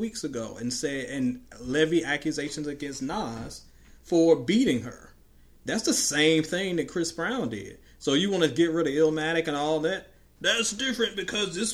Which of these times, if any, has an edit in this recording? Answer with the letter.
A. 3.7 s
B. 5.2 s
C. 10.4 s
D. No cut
C